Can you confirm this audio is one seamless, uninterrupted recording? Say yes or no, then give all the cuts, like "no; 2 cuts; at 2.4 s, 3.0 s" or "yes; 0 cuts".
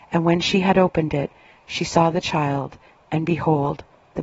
yes; 0 cuts